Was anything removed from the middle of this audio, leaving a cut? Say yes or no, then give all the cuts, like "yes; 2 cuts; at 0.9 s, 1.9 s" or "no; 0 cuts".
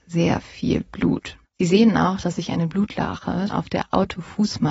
yes; 2 cuts; at 1.5 s, 3.5 s